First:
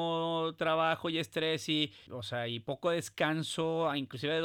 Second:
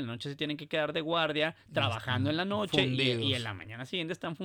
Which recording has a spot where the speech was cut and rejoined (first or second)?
first